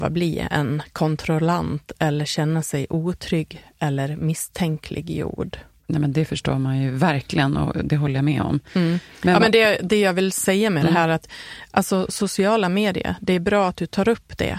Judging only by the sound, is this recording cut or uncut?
uncut